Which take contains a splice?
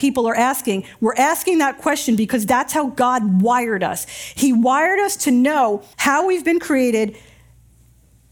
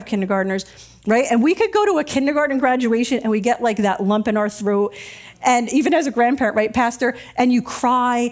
first; 1 cut; at 5.9 s

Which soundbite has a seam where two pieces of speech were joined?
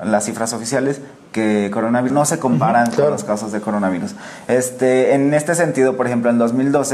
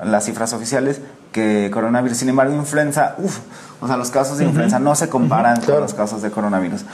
first; 1 cut; at 2.1 s

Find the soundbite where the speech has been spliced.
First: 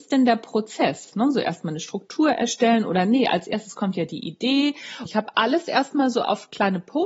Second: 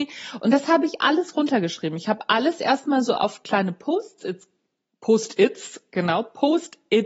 first; 1 cut; at 5.1 s

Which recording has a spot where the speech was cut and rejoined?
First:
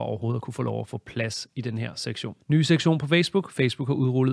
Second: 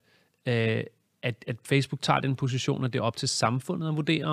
first; 1 cut; at 2.4 s

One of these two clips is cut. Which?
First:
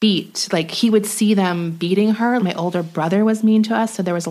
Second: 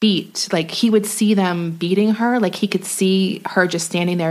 first; 1 cut; at 2.4 s

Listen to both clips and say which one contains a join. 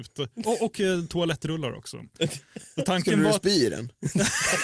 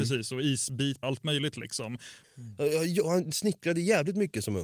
second; 2 cuts; at 1.0 s, 2.2 s

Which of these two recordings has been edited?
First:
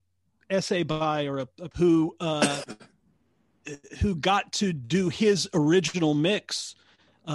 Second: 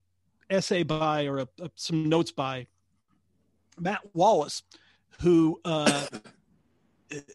first; 1 cut; at 1.7 s

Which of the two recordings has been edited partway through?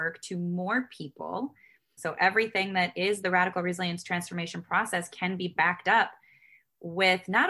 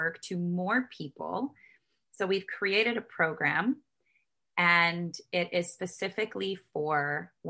first; 1 cut; at 2.0 s

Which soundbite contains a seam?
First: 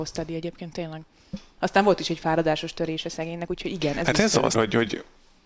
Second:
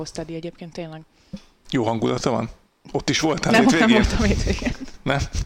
first; 2 cuts; at 1.6 s, 4.5 s

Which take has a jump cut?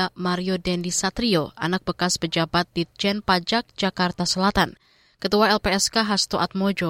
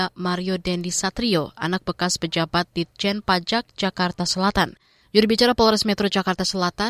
second; 1 cut; at 5.0 s

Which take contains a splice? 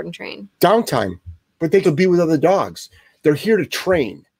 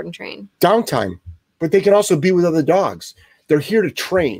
first; 1 cut; at 1.8 s

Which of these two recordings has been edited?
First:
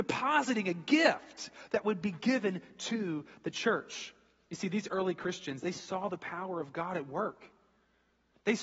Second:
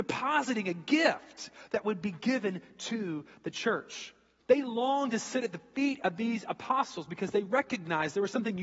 second; 1 cut; at 4.4 s

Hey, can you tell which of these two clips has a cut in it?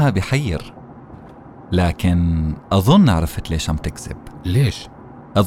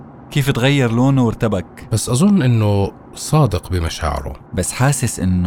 second; 1 cut; at 4.5 s

